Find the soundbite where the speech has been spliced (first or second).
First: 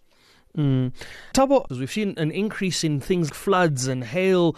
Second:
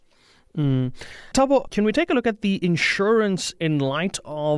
first